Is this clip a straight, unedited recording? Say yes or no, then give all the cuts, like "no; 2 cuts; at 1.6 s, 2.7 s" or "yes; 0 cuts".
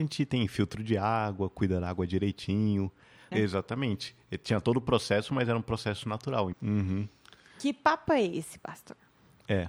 no; 2 cuts; at 3.3 s, 6.5 s